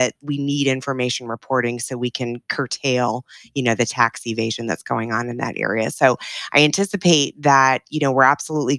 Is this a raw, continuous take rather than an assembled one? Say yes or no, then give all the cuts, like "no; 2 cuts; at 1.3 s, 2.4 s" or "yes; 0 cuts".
yes; 0 cuts